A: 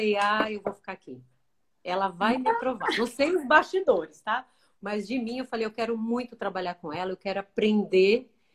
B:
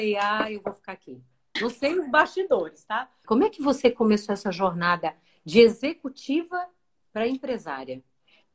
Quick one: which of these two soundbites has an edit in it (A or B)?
B